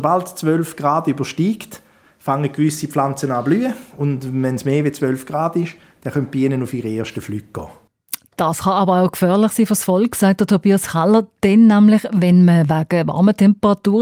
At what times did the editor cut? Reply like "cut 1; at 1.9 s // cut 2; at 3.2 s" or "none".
none